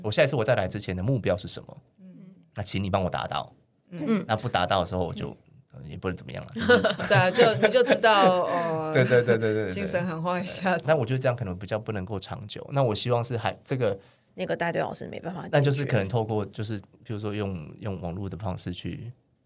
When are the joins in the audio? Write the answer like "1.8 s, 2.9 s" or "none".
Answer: 10.8 s, 14.3 s